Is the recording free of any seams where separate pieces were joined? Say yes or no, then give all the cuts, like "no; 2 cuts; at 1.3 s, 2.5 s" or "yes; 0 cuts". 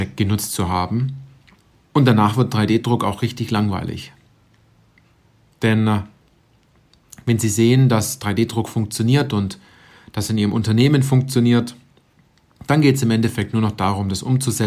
yes; 0 cuts